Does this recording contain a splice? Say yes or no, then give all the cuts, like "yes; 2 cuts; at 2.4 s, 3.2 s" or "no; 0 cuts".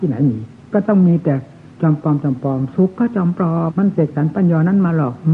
yes; 1 cut; at 3.7 s